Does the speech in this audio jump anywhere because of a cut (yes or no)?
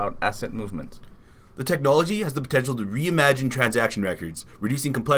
no